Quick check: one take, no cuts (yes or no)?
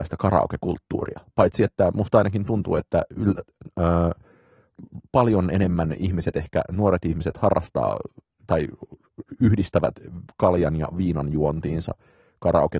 yes